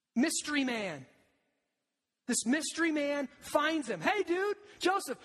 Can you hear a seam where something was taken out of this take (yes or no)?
no